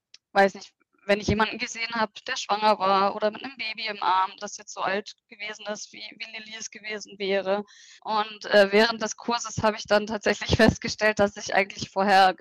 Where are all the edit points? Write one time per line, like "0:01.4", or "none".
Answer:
0:08.0